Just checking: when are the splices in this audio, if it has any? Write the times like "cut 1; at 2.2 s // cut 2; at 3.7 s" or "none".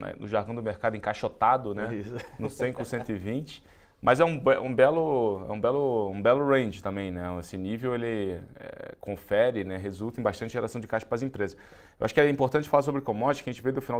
none